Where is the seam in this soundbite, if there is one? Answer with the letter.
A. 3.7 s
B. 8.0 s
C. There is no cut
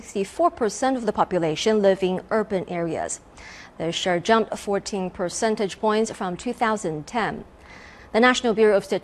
B